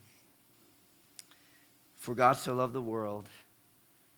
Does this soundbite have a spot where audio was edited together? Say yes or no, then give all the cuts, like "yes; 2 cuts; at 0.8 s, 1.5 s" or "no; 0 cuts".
no; 0 cuts